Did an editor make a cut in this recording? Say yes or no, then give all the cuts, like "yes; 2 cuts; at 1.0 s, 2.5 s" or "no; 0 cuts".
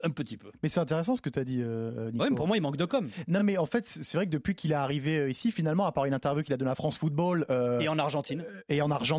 no; 0 cuts